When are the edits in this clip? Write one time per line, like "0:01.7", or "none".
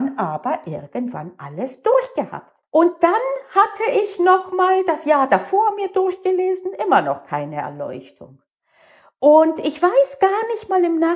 0:02.6